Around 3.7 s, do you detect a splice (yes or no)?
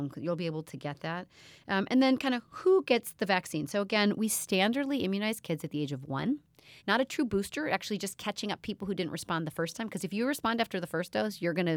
no